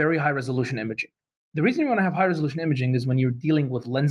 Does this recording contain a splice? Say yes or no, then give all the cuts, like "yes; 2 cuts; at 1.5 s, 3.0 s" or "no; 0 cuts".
no; 0 cuts